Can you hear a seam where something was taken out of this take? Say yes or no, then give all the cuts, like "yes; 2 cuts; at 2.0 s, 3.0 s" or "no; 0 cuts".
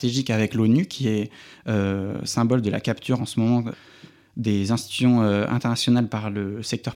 yes; 1 cut; at 3.2 s